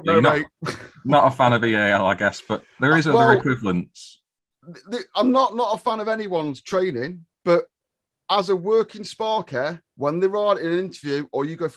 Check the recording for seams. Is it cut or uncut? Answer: cut